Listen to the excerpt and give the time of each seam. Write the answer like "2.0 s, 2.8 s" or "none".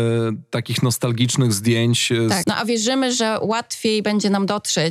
2.4 s